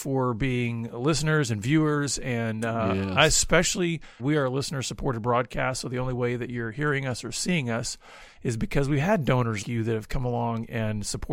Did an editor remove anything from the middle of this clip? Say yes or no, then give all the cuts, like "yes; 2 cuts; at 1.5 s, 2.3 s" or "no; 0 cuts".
yes; 2 cuts; at 4.2 s, 9.6 s